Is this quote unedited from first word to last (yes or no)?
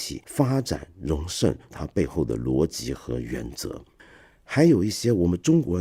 no